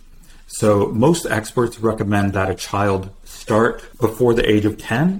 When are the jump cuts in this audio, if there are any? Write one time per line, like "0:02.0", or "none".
0:03.9